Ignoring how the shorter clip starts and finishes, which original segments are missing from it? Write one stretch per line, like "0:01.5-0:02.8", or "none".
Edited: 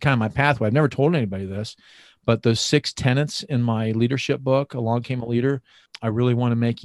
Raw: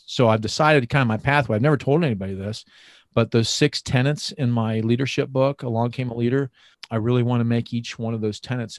none